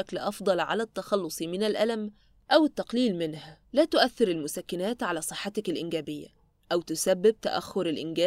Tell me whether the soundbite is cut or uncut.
cut